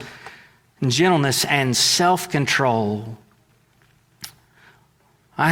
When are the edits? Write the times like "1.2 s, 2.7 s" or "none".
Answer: none